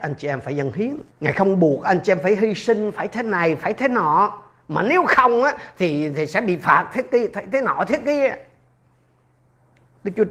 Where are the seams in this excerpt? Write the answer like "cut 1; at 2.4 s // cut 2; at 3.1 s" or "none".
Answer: cut 1; at 1.1 s